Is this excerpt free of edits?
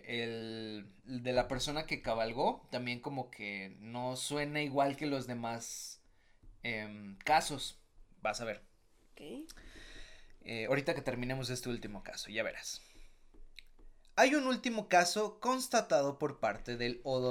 yes; 0 cuts

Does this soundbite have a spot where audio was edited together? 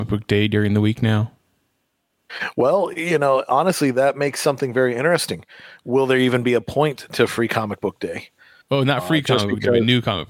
no; 0 cuts

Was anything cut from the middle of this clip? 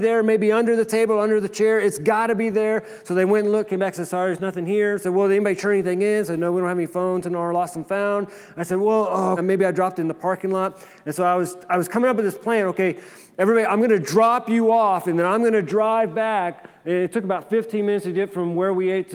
yes; 1 cut; at 9.4 s

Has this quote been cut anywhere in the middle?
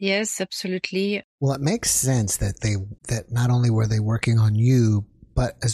yes; 2 cuts; at 1.2 s, 3.0 s

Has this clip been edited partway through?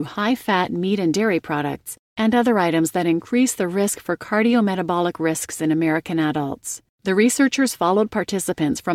yes; 1 cut; at 6.9 s

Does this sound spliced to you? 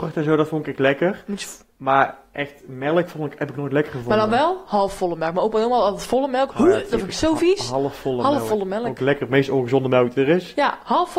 no; 0 cuts

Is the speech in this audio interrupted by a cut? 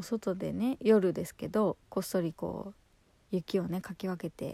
no; 0 cuts

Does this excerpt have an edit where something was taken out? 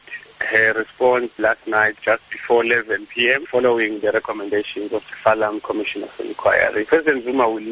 no; 0 cuts

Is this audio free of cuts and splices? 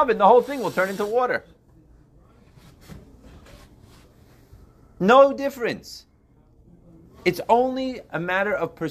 yes; 0 cuts

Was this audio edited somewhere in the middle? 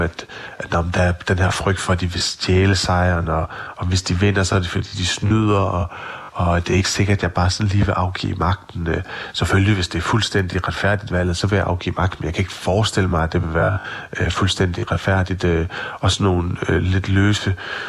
no; 0 cuts

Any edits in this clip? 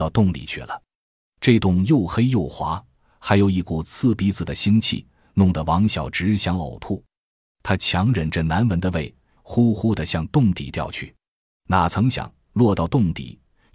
yes; 2 cuts; at 9.4 s, 11.5 s

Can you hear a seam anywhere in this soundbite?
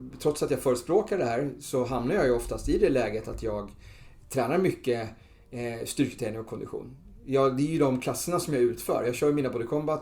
no; 0 cuts

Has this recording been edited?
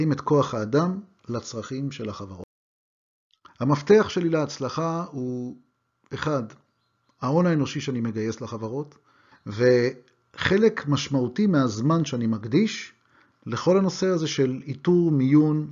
yes; 2 cuts; at 3.5 s, 9.3 s

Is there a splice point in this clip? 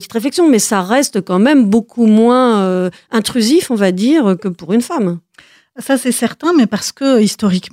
no; 0 cuts

